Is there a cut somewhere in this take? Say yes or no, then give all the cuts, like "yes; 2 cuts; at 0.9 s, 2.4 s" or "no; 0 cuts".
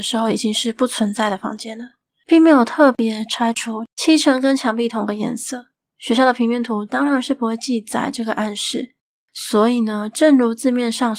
yes; 1 cut; at 3.9 s